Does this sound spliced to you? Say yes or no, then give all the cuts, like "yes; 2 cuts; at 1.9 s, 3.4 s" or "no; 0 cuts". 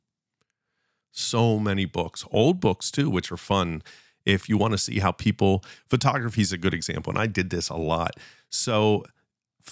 no; 0 cuts